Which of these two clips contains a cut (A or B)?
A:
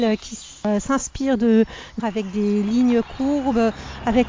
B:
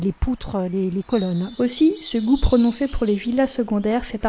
A